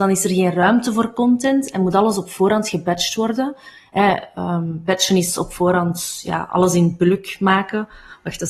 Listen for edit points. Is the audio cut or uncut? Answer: uncut